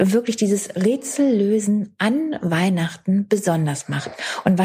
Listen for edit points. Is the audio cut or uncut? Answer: uncut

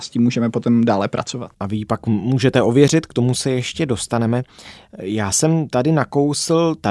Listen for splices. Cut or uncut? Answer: uncut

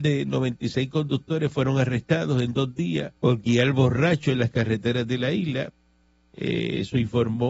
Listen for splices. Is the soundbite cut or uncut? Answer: cut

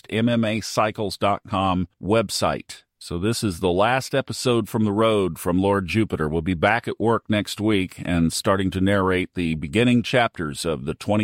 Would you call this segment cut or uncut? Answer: uncut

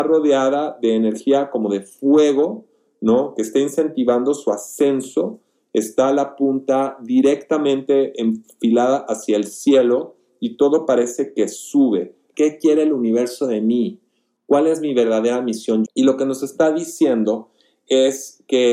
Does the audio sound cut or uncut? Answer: cut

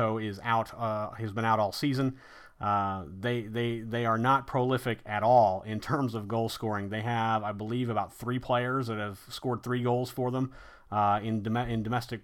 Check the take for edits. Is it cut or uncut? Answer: uncut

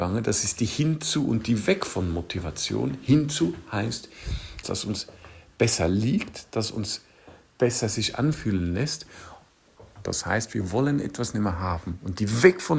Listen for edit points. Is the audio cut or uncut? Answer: cut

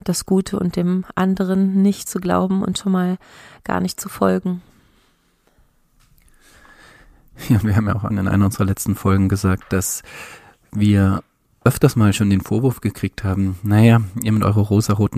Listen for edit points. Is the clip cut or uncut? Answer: cut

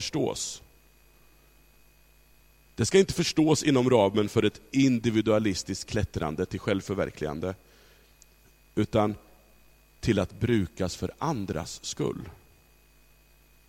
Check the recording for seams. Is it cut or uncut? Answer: uncut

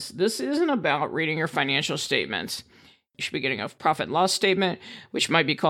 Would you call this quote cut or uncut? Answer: cut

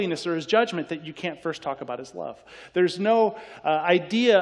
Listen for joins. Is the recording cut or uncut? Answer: uncut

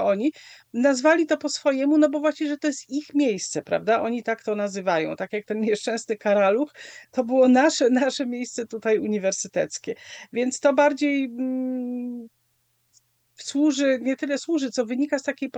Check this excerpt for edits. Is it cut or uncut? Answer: uncut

